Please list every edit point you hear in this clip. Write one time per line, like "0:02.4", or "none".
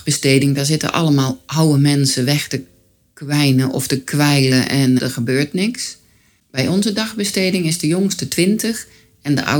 0:05.0